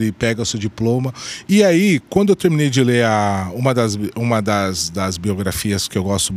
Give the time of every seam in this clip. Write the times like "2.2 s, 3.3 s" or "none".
1.4 s